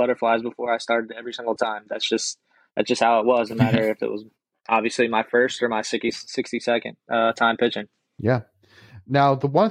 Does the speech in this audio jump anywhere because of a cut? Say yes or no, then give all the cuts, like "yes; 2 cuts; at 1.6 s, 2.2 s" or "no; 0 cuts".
no; 0 cuts